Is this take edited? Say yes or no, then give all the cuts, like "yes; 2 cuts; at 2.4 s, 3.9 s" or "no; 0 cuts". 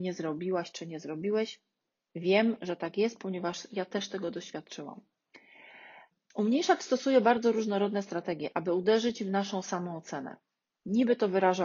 no; 0 cuts